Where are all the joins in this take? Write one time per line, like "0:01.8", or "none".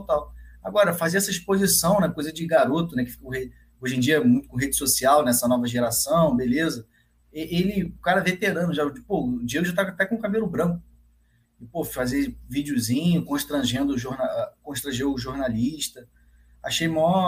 none